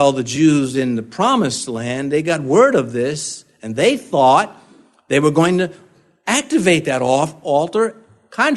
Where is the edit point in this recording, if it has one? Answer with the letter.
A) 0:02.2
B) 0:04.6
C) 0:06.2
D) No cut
D